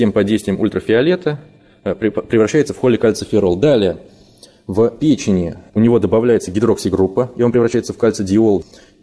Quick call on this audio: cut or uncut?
uncut